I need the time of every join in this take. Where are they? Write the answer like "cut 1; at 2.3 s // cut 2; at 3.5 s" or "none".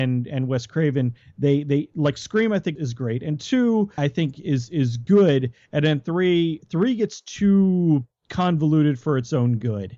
cut 1; at 2.8 s // cut 2; at 4.0 s // cut 3; at 6.6 s